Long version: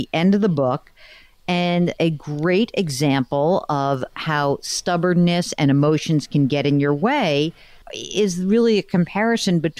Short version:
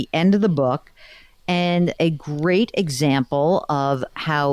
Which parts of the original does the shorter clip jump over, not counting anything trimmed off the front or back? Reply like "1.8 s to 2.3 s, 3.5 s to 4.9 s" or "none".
none